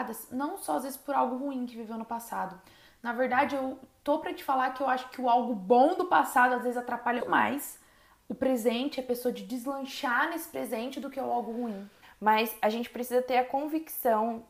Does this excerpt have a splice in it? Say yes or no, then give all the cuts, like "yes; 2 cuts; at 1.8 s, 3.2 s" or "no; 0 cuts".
yes; 2 cuts; at 7.2 s, 12.0 s